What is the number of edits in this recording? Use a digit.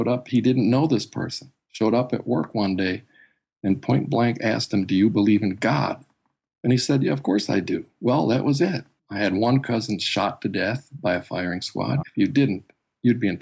2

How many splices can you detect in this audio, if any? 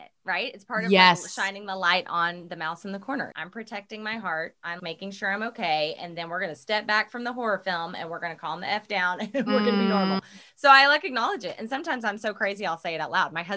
2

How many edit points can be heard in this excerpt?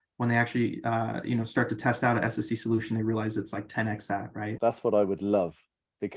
1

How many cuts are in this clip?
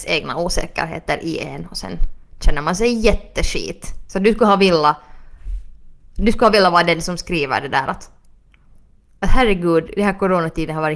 0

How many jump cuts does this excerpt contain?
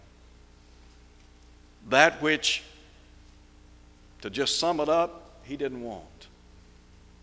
0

